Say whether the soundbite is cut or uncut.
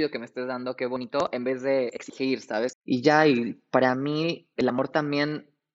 cut